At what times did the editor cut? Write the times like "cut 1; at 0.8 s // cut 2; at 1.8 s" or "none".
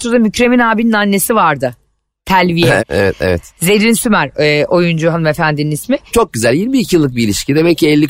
cut 1; at 2.8 s // cut 2; at 6.1 s